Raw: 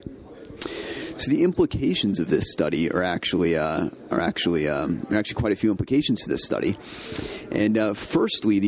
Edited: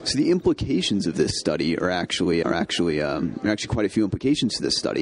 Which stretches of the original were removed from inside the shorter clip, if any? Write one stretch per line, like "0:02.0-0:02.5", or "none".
0:03.5-0:04.1